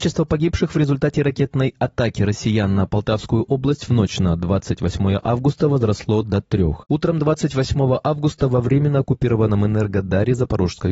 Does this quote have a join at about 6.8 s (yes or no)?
yes